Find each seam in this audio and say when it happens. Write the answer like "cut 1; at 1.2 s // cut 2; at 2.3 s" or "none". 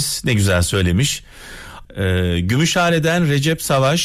cut 1; at 1.8 s